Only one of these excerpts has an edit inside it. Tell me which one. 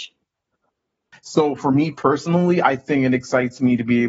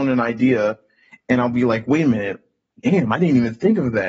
first; 1 cut; at 1.1 s

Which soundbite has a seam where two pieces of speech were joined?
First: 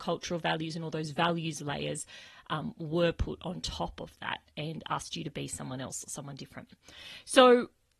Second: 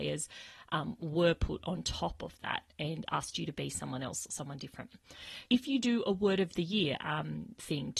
second; 1 cut; at 5.5 s

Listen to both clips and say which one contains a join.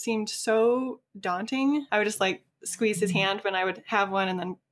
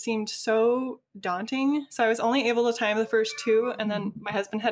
first; 1 cut; at 1.9 s

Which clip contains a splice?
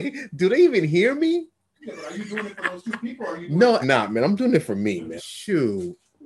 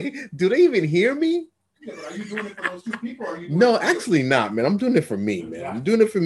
first; 2 cuts; at 3.8 s, 5.2 s

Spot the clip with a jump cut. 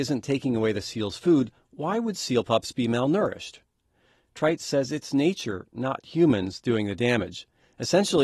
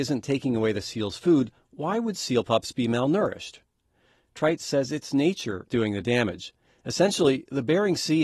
second; 1 cut; at 5.7 s

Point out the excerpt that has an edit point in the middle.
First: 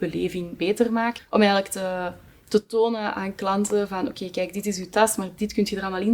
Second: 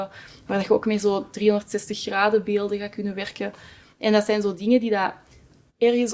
first; 1 cut; at 1.2 s

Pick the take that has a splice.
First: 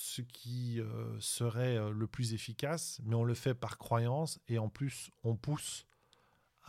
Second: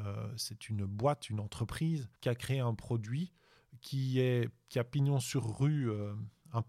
second; 1 cut; at 2.2 s

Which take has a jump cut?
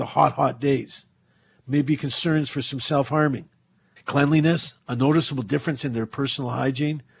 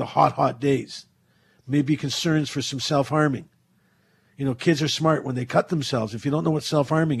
first; 1 cut; at 4.0 s

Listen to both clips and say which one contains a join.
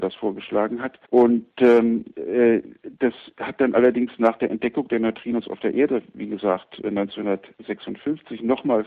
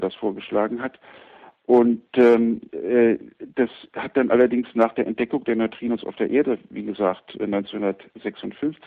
first; 1 cut; at 1.0 s

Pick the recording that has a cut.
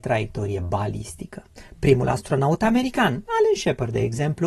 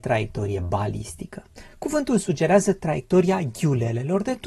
first; 1 cut; at 1.7 s

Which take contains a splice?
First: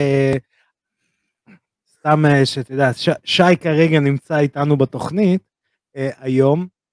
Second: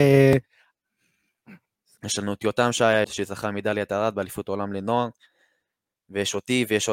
second; 2 cuts; at 2.0 s, 3.0 s

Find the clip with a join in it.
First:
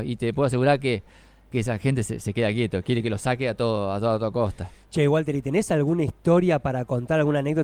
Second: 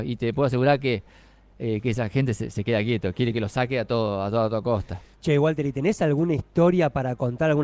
first; 1 cut; at 1.5 s

